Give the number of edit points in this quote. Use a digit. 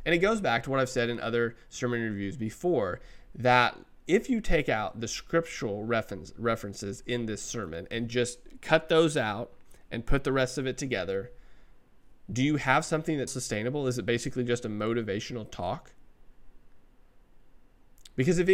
1